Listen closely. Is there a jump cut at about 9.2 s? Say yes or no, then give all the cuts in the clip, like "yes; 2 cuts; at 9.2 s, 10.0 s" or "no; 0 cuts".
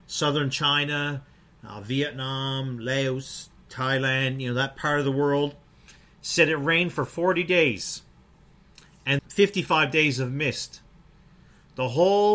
yes; 1 cut; at 9.2 s